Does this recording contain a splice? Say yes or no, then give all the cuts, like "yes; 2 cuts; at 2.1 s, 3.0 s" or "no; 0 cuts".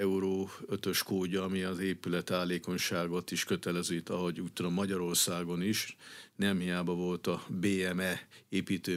no; 0 cuts